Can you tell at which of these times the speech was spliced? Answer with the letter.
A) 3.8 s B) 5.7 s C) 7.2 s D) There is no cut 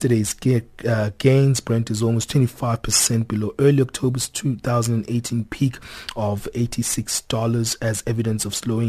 D